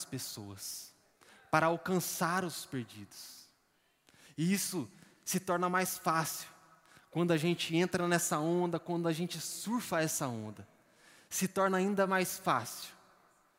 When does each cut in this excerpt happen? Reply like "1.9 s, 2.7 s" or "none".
none